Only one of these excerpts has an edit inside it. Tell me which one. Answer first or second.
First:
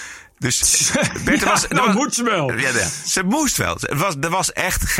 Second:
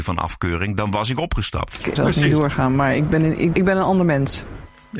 second